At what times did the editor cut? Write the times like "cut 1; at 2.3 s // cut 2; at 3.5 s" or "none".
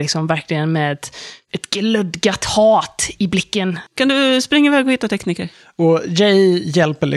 cut 1; at 3.9 s